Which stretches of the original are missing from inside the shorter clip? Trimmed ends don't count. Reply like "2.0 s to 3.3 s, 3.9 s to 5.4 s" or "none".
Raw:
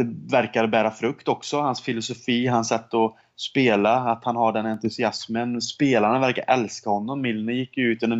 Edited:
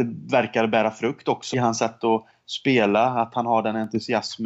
1.5 s to 2.4 s

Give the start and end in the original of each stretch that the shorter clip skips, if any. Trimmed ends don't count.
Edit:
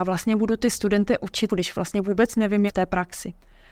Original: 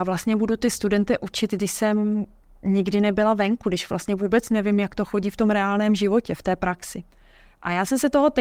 1.5 s to 3.6 s, 4.8 s to 6.4 s

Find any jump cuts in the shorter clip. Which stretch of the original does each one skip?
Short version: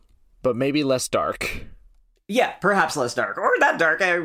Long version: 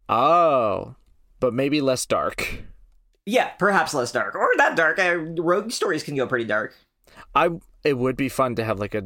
none

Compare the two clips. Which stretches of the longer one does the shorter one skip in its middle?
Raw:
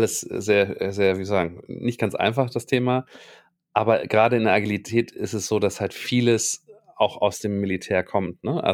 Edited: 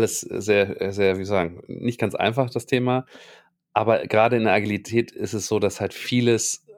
none

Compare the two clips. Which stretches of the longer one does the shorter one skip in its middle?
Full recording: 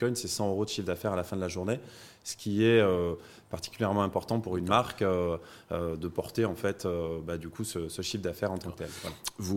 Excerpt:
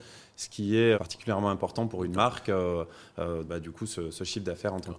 2.8 s to 3.5 s, 6.0 s to 7.2 s

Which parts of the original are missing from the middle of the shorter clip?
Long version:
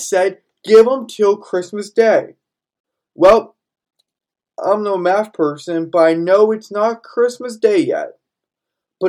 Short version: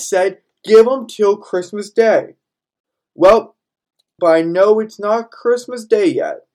4.2 s to 5.9 s

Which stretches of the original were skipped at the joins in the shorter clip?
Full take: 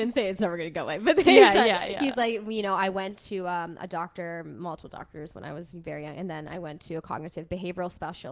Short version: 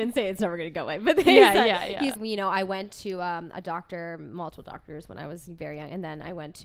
2.2 s to 2.4 s

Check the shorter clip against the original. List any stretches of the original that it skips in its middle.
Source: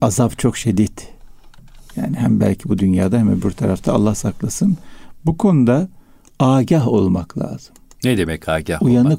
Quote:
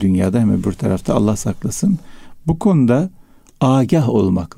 none

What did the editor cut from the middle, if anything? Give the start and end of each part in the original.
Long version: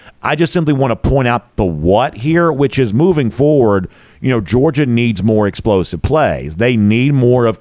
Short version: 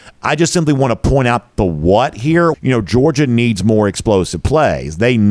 2.5 s to 4.1 s

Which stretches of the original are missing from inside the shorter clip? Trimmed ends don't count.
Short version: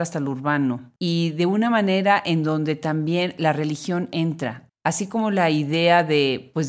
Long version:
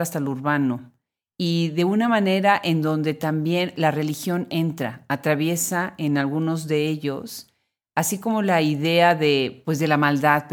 1.0 s to 1.3 s, 5.1 s to 7.8 s

